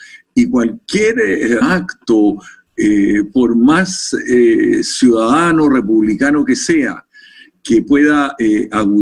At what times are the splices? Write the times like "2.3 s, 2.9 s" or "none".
1.6 s